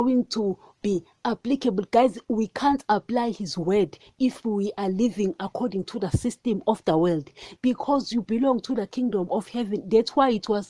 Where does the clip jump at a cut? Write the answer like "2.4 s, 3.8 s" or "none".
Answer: 7.6 s

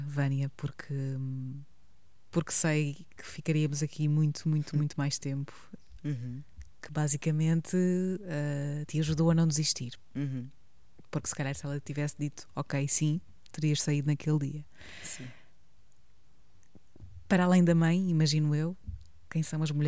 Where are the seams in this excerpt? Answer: 6.0 s

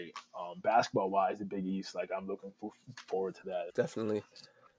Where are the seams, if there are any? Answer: 3.7 s

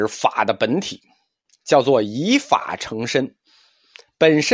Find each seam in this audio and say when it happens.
none

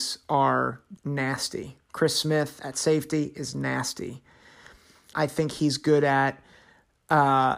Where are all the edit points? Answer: 1.0 s, 5.1 s

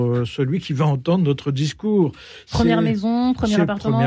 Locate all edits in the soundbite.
none

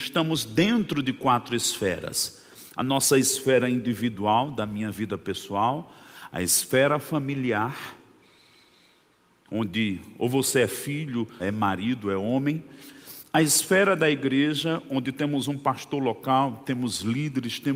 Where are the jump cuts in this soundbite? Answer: 11.4 s

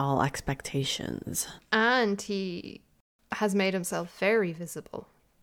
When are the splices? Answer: 1.6 s

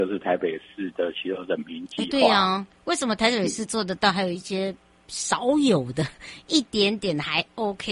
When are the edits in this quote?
none

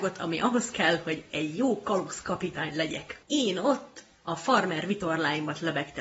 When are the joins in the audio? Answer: none

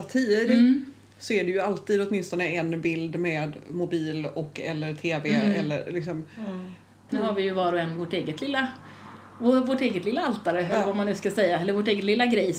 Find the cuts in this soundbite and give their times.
7.1 s

